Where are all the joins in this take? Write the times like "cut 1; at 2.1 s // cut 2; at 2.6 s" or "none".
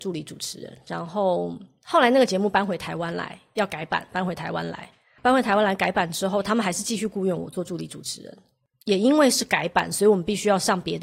none

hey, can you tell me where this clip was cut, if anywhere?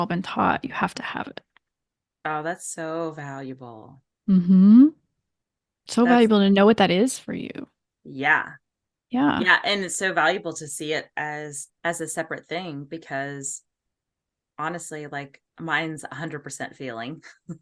cut 1; at 11.7 s

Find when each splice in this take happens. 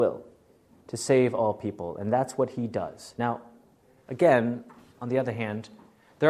none

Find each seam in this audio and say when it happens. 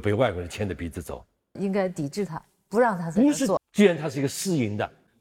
cut 1; at 1.6 s // cut 2; at 3.6 s

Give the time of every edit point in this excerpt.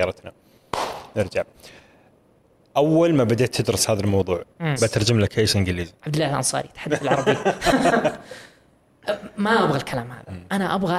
cut 1; at 4.8 s

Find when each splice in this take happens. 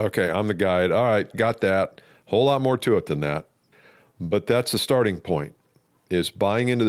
cut 1; at 1.3 s

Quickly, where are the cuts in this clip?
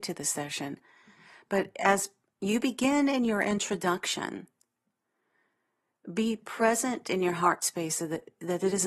none

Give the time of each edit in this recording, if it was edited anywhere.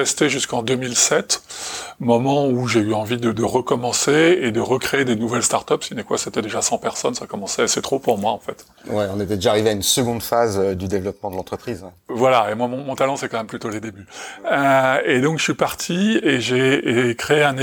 none

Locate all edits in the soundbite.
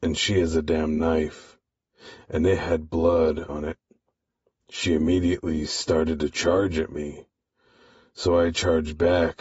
cut 1; at 3.5 s

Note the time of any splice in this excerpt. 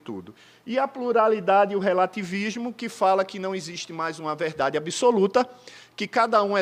none

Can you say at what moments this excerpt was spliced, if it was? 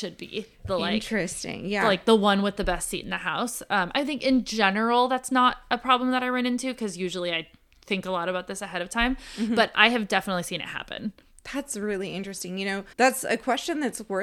cut 1; at 12.9 s

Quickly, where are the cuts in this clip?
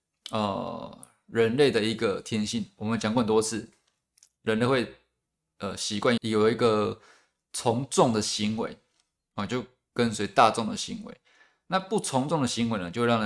cut 1; at 6.2 s

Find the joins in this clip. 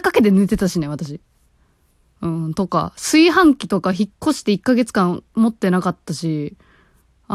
none

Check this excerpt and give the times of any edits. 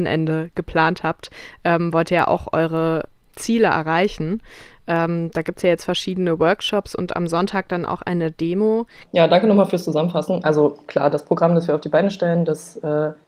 cut 1; at 9.1 s

